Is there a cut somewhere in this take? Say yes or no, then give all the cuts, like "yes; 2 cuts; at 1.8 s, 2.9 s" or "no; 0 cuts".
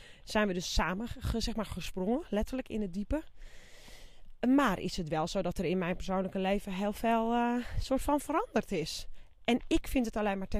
no; 0 cuts